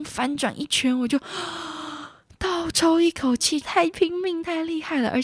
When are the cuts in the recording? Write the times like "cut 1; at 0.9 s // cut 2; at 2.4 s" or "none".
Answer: cut 1; at 3.6 s